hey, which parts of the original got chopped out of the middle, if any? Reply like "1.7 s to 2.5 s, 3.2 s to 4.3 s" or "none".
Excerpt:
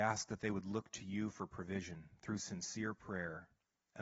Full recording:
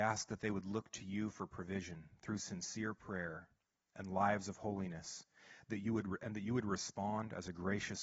none